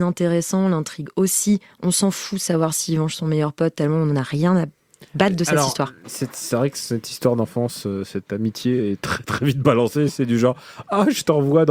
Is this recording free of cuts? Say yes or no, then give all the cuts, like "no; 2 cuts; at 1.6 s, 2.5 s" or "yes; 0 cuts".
yes; 0 cuts